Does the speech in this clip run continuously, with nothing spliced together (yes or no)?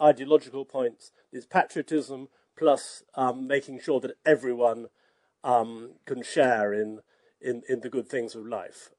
yes